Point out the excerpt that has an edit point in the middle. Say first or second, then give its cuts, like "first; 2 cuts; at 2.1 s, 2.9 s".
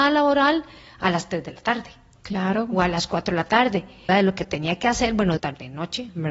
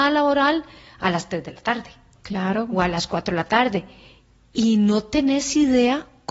first; 2 cuts; at 4.1 s, 5.4 s